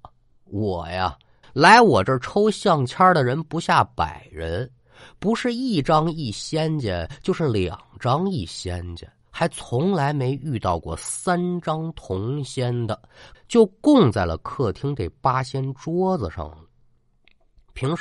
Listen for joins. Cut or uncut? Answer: cut